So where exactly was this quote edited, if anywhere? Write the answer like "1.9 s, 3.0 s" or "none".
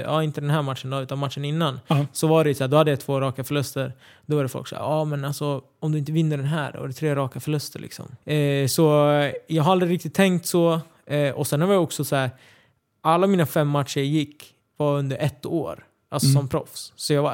8.2 s